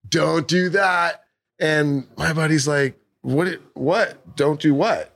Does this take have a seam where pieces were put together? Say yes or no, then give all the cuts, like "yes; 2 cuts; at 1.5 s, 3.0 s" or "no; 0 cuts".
no; 0 cuts